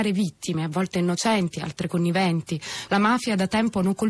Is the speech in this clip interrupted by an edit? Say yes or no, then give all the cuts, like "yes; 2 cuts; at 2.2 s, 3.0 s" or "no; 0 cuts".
yes; 1 cut; at 2.9 s